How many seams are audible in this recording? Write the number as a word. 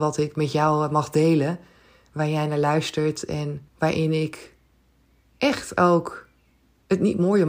one